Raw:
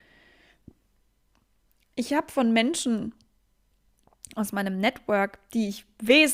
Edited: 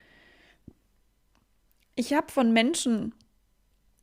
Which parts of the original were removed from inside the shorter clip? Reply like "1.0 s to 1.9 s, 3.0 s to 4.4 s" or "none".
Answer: none